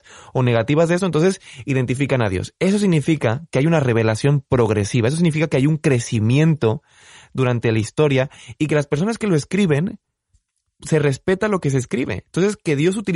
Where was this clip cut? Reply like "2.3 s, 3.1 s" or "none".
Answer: none